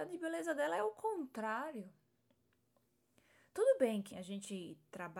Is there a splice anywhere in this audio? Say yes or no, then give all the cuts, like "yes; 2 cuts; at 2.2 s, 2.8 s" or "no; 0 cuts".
yes; 1 cut; at 4.1 s